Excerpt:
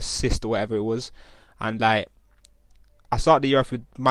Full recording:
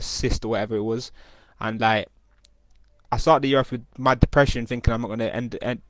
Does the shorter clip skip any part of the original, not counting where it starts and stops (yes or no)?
no